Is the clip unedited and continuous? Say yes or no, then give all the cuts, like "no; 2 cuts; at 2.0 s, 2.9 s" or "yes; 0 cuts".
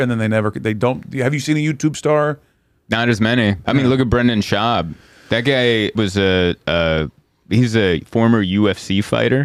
no; 1 cut; at 5.9 s